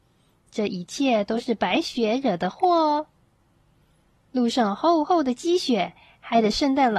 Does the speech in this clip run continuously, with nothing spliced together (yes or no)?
yes